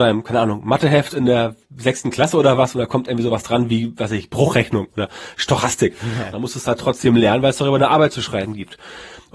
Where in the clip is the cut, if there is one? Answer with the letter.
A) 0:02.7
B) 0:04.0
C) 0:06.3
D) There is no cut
C